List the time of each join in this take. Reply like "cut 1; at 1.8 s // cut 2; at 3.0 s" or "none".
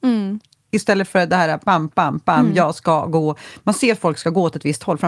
none

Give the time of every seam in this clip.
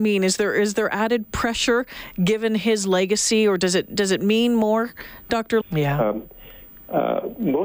cut 1; at 5.6 s

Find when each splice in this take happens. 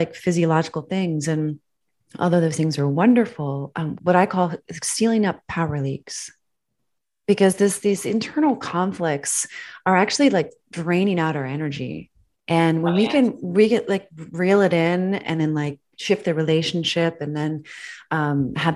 cut 1; at 4.0 s

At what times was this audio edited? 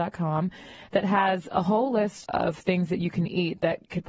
cut 1; at 2.2 s

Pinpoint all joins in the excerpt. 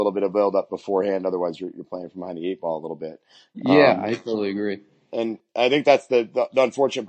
none

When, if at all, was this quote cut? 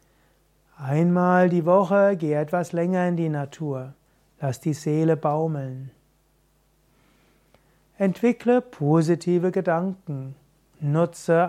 none

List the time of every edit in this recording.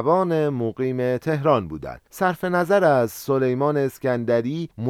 none

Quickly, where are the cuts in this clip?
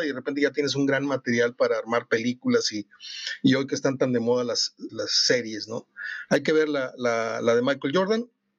cut 1; at 4.9 s // cut 2; at 6.3 s

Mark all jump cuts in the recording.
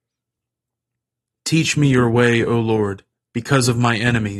cut 1; at 3.2 s

